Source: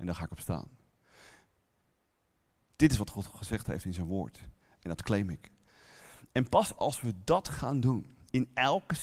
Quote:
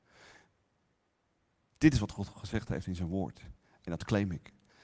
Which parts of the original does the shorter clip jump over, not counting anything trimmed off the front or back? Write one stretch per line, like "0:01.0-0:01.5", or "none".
none

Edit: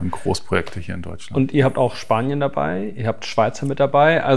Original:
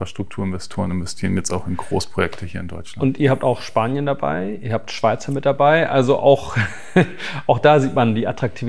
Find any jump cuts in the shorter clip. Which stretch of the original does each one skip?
none

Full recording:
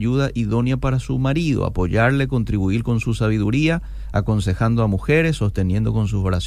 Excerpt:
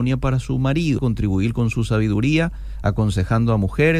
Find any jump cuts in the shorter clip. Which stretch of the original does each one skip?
0:01.6-0:02.3

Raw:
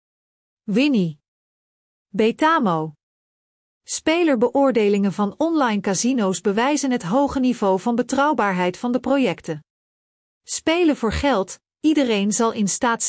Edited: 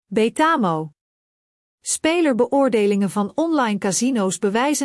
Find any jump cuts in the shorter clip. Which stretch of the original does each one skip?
none

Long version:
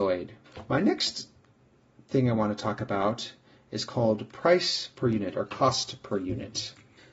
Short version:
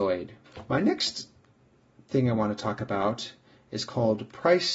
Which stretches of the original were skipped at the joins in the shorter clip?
none

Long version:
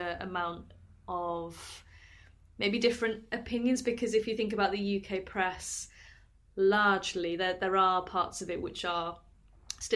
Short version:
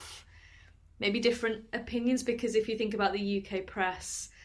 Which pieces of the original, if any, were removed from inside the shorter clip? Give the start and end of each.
none

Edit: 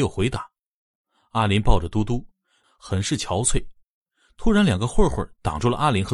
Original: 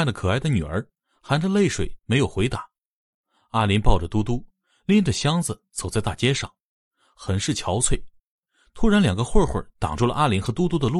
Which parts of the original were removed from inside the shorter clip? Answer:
0:04.8-0:07.0

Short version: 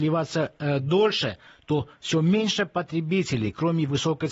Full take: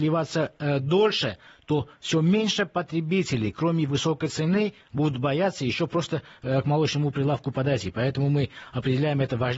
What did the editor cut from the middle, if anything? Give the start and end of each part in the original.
none

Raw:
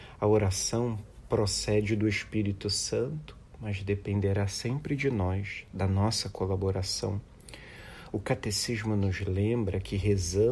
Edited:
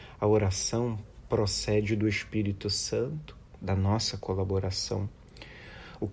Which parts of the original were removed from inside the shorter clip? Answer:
0:03.6-0:05.7

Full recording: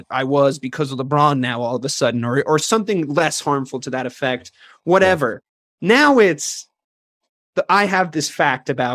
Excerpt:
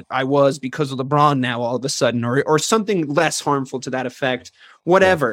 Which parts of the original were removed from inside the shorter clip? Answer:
none

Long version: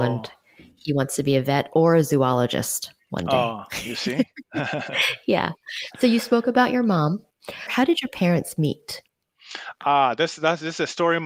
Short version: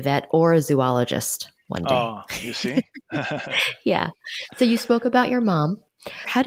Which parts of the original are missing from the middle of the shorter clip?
none

